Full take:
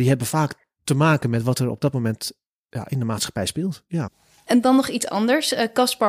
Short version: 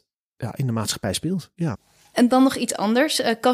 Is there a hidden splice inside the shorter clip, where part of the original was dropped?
no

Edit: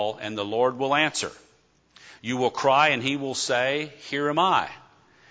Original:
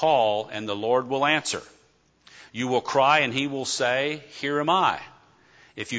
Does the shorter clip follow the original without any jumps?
yes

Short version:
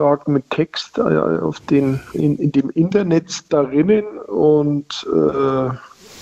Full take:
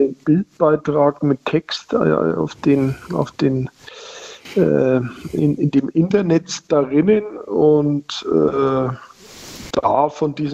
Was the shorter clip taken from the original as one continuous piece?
no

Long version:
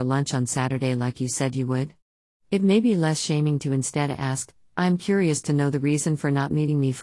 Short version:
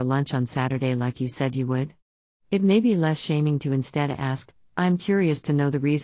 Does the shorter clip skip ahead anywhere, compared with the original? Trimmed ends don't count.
no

